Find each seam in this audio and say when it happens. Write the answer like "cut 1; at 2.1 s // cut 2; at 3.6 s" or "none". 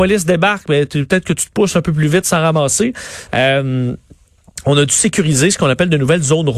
cut 1; at 3.3 s